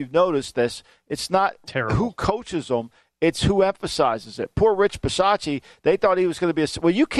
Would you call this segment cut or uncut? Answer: uncut